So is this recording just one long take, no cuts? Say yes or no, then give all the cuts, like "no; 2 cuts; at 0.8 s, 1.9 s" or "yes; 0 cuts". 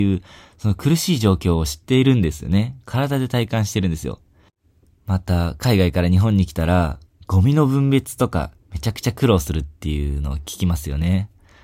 yes; 0 cuts